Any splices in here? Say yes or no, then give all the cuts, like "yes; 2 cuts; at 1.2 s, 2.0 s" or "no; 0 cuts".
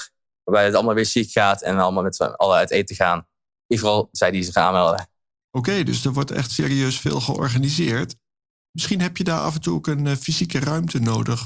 no; 0 cuts